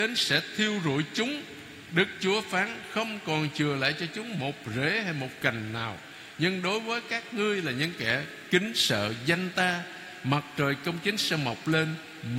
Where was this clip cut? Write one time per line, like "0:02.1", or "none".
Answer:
none